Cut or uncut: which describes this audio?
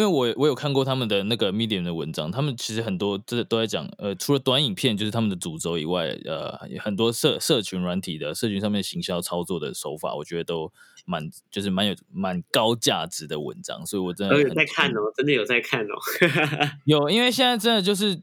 uncut